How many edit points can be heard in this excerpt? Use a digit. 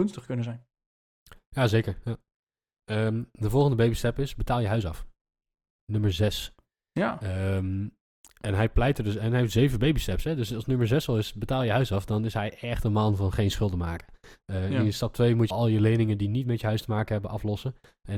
2